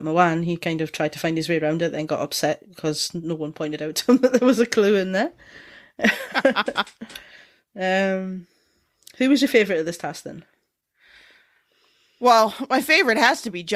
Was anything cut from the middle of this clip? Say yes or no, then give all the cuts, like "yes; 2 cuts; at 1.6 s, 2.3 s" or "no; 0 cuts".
no; 0 cuts